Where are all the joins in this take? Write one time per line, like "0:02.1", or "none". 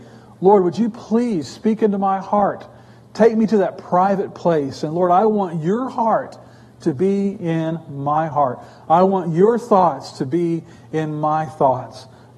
none